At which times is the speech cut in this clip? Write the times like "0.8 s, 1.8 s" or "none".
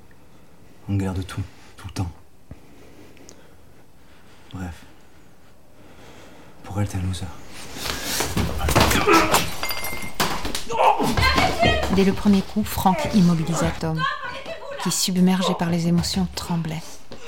none